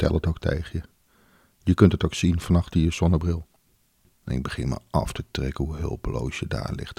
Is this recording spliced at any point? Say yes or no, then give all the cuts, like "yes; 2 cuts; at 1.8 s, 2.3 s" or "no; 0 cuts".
yes; 1 cut; at 4.1 s